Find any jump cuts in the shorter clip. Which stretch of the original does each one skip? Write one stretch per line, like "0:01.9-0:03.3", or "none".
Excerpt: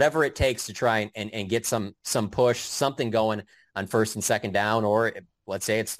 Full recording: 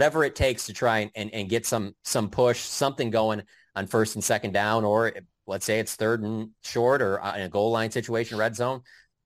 none